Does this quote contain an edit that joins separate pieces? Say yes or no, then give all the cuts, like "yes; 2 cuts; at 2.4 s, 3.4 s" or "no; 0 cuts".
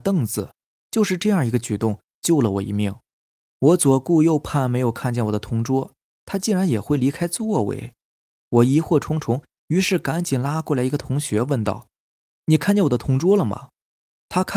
no; 0 cuts